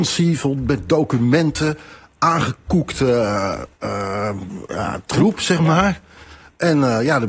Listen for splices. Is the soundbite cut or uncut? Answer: uncut